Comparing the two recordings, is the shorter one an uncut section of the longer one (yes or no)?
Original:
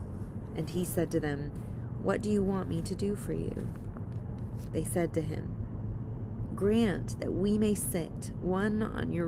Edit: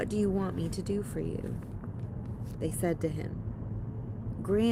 yes